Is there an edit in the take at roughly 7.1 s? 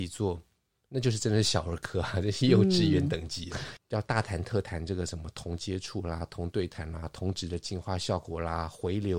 no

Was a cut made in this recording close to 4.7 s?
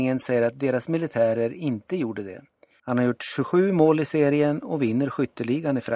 no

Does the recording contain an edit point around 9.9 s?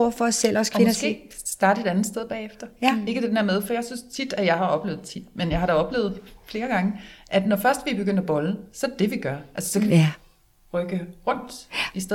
yes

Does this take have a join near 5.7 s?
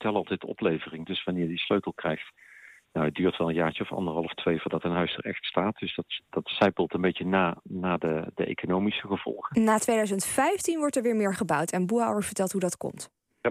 no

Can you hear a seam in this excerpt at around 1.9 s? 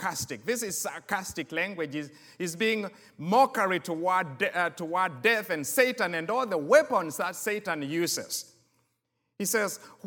no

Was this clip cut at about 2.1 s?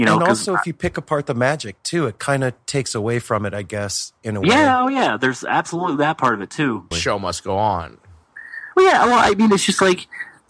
no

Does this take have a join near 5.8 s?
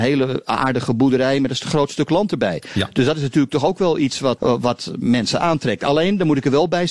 no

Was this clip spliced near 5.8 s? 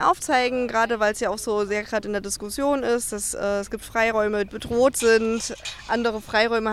no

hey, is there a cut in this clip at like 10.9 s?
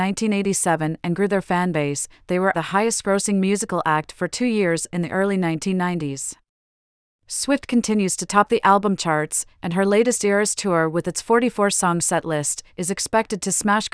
no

